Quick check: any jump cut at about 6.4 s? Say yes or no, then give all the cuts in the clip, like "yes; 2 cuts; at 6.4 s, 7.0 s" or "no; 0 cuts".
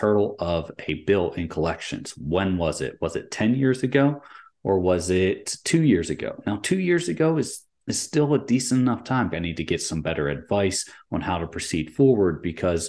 no; 1 cut; at 9.3 s